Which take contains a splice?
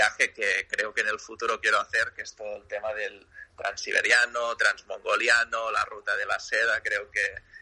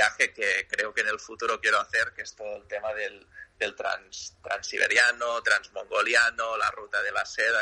first; 1 cut; at 3.5 s

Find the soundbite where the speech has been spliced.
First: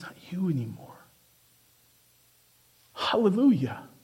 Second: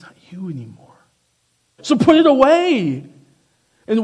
second; 1 cut; at 1.8 s

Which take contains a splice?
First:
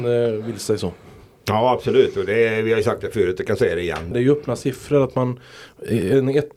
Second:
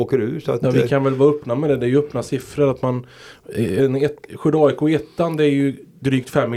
first; 1 cut; at 4.1 s

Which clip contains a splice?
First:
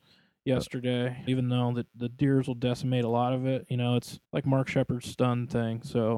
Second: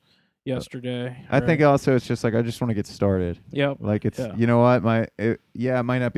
first; 2 cuts; at 1.3 s, 4.2 s

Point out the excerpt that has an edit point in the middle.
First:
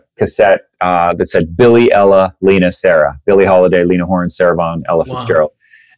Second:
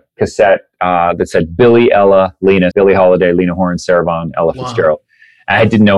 second; 1 cut; at 2.7 s

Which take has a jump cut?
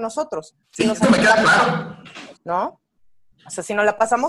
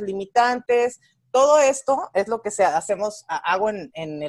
first; 1 cut; at 2.4 s

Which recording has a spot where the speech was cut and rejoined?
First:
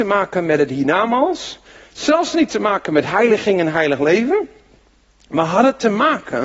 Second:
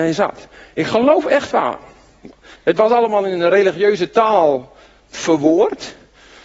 second; 1 cut; at 2.5 s

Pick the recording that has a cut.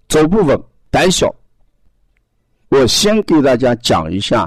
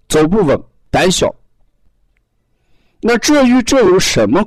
first; 1 cut; at 2.6 s

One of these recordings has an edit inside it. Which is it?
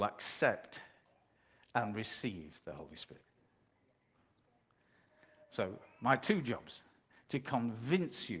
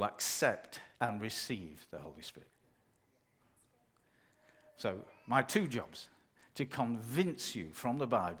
second; 1 cut; at 0.9 s

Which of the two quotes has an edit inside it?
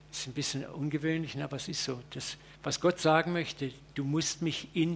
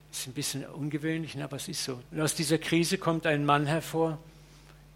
second; 1 cut; at 2.1 s

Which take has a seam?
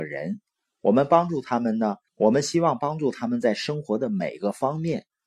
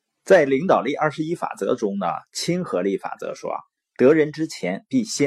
first; 1 cut; at 2.1 s

